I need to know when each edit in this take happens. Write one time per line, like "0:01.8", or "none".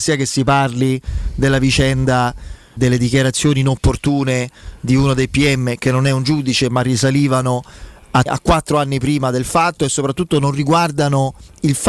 0:02.8
0:08.3